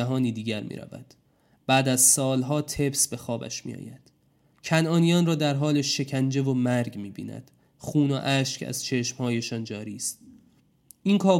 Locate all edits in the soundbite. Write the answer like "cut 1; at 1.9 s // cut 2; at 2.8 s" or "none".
none